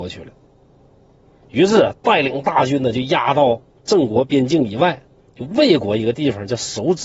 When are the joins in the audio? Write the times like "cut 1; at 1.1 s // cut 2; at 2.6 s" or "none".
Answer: cut 1; at 1.4 s